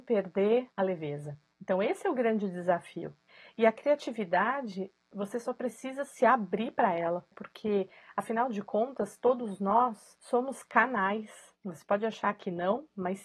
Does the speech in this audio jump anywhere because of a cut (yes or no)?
no